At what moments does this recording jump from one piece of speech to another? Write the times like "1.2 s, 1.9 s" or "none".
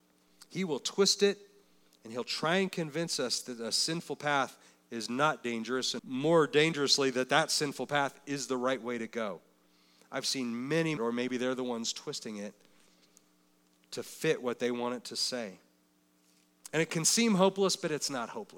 6.0 s, 11.0 s